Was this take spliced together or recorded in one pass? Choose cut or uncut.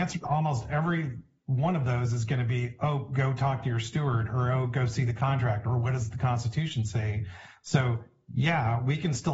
uncut